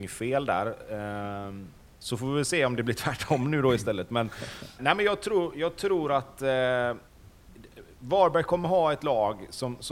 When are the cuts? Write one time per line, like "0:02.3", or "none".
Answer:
0:01.9
0:04.8